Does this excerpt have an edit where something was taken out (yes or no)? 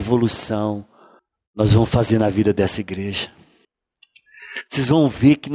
no